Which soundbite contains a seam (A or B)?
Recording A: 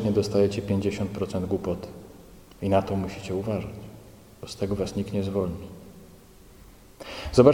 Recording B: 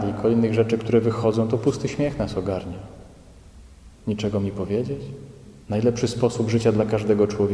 B